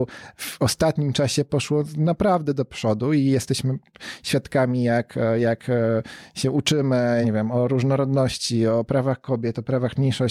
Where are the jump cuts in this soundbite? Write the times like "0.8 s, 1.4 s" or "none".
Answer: 7.2 s

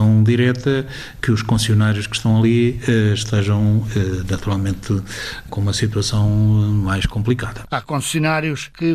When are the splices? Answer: 5.5 s, 7.7 s

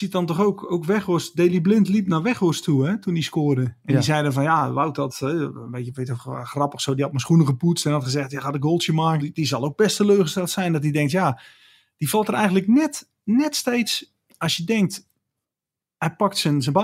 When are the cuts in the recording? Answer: 9.2 s

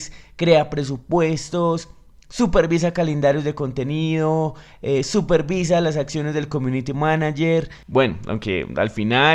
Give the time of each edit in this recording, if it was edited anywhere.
none

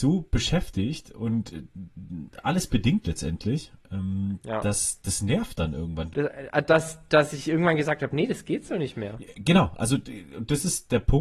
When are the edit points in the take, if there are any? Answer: 6.1 s, 9.3 s

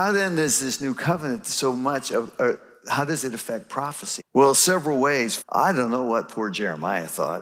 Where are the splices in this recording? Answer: 4.2 s, 5.4 s

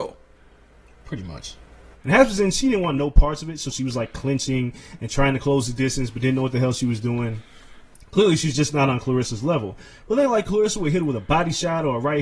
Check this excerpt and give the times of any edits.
2.0 s

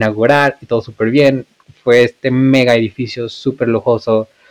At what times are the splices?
none

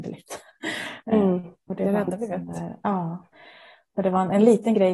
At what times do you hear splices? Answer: none

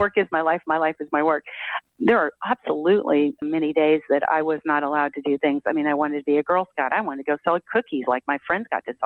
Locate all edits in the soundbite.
none

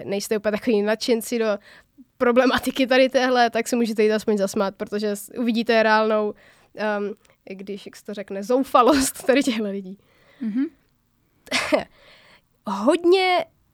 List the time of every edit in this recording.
10.2 s

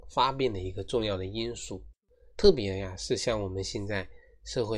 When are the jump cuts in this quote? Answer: none

